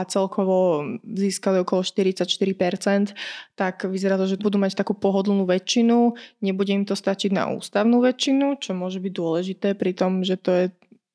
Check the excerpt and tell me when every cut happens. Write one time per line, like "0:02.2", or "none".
0:04.4